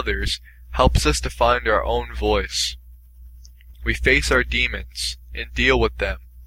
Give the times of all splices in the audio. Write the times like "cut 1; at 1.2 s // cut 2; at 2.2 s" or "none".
cut 1; at 3.7 s